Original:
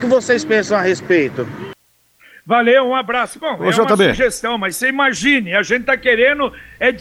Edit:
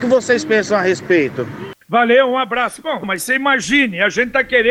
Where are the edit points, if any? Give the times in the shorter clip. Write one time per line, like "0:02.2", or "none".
0:01.8
0:03.0